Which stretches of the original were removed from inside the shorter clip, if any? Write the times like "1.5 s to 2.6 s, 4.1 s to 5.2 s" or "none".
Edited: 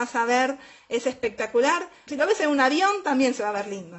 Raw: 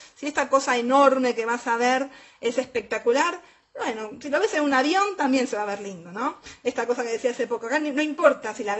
3.6 s to 4.2 s